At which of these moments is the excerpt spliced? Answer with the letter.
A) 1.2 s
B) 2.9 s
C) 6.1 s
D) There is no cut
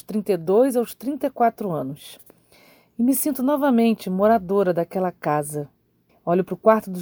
C